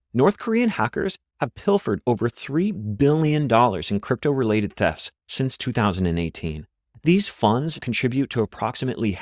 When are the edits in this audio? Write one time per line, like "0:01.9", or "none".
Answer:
0:07.8